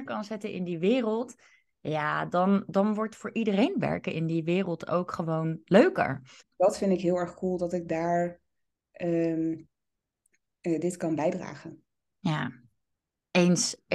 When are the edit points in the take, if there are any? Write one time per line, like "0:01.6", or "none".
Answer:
0:06.4